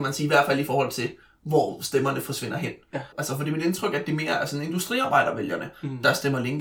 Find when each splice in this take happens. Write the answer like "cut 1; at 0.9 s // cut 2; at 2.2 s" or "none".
cut 1; at 3.1 s